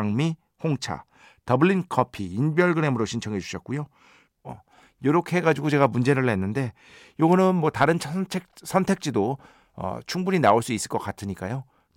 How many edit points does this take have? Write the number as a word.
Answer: one